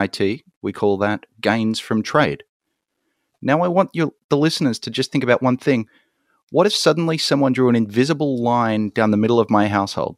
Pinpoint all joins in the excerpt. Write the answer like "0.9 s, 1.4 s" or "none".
none